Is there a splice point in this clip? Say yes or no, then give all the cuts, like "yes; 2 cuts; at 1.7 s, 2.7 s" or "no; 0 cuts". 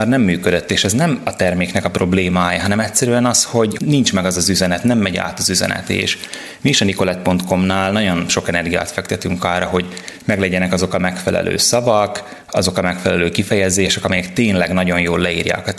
no; 0 cuts